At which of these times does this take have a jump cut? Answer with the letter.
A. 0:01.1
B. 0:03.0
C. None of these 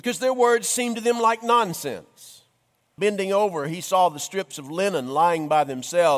B